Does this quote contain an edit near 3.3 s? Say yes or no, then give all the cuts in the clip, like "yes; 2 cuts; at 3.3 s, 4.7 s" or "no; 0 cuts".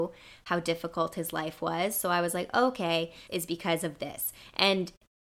yes; 1 cut; at 3.3 s